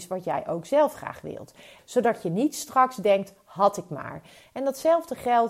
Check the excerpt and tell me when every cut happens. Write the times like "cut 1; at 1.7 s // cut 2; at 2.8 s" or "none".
cut 1; at 1.8 s